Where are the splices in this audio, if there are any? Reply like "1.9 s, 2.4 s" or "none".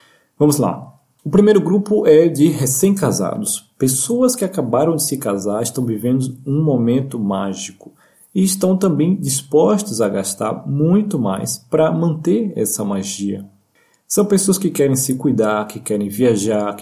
none